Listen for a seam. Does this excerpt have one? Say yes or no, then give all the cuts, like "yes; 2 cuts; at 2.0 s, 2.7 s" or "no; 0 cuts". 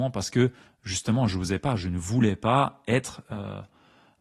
no; 0 cuts